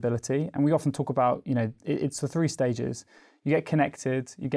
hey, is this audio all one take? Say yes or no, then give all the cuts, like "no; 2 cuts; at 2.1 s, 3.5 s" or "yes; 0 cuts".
yes; 0 cuts